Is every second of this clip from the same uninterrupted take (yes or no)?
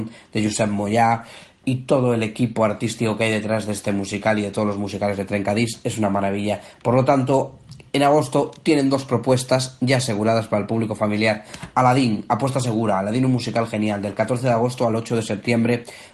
no